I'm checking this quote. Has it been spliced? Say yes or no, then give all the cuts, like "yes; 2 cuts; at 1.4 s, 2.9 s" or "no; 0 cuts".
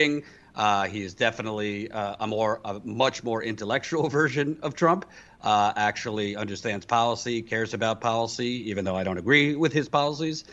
no; 0 cuts